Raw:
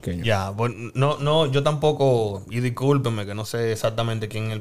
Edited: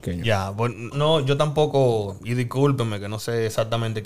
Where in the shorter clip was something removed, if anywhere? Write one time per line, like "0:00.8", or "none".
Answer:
0:00.9

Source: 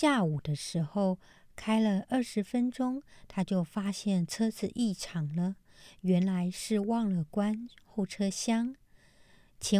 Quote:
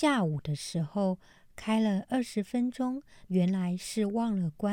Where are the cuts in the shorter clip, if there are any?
0:03.3

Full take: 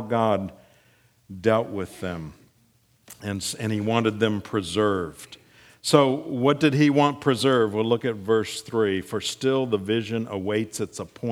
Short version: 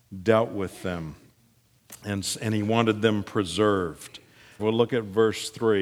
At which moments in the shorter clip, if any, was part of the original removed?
0:04.6

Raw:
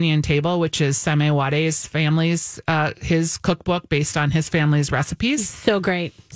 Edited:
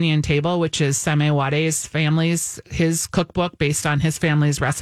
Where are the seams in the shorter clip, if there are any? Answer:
0:02.6

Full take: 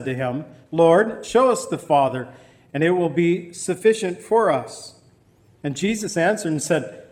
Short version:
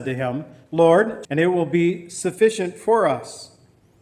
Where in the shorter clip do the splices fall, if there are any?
0:01.2

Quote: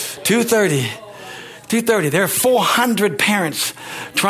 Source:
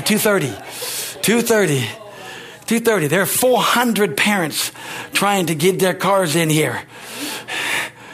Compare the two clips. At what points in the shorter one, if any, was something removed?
none

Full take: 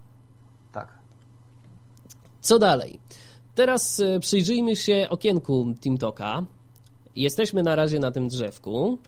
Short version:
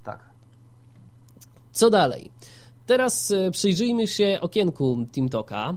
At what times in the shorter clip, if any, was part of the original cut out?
none

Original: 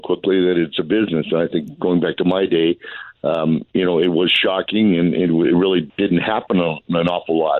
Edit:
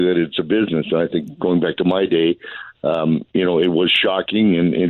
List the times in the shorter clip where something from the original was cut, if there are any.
none

